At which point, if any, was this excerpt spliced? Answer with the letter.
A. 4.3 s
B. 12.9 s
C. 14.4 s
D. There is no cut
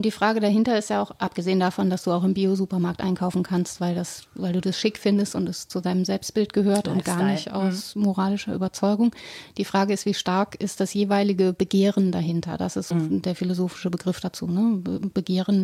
B